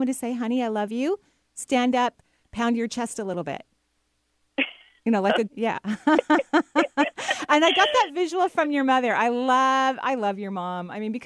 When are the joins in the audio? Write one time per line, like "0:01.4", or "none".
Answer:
0:05.5